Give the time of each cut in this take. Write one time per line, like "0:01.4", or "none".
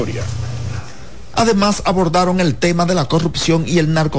0:01.3